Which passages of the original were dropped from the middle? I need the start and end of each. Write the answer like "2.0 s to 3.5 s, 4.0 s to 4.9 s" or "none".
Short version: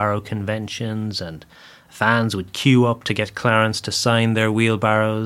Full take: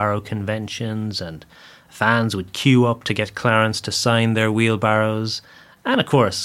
none